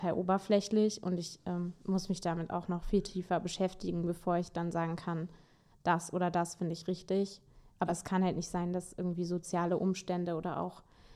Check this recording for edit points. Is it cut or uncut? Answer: uncut